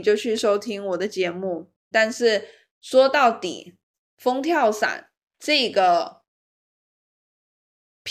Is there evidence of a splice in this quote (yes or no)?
yes